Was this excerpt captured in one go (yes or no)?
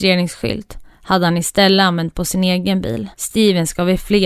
no